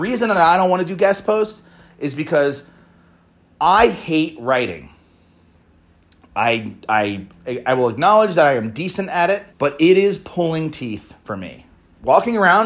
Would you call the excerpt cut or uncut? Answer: cut